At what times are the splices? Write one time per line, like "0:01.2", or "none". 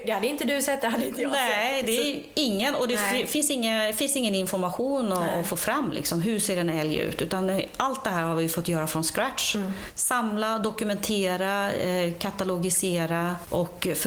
none